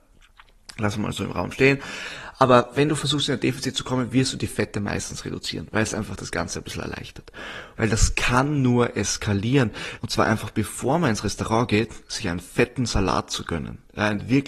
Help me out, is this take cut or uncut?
cut